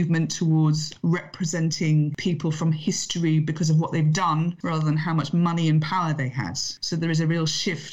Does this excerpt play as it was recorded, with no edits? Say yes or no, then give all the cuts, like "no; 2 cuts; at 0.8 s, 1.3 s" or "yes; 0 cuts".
yes; 0 cuts